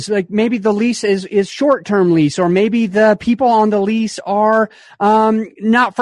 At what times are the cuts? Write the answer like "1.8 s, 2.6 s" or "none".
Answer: none